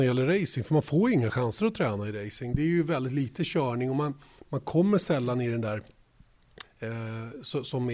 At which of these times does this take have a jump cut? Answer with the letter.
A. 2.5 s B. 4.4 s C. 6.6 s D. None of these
C